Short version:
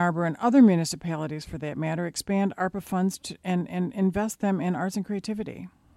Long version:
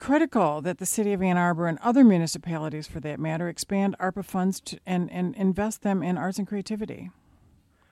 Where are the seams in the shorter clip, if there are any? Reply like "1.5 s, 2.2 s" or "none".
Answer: none